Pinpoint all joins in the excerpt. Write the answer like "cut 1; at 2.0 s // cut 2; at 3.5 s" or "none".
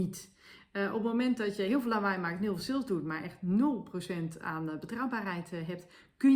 none